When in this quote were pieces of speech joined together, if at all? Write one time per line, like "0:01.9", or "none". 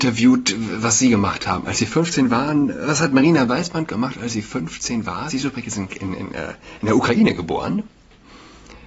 none